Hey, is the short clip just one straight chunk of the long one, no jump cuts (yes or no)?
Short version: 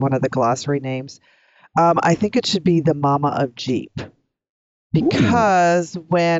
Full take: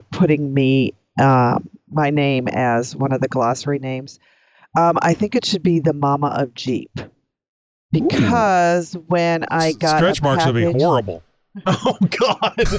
yes